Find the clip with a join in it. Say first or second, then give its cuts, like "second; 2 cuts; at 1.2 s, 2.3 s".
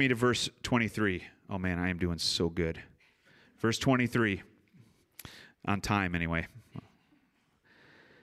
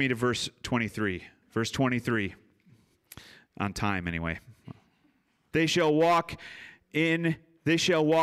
second; 2 cuts; at 1.4 s, 5.5 s